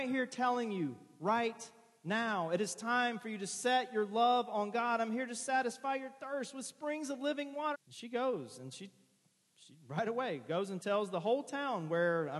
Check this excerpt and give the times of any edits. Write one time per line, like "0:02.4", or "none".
0:07.7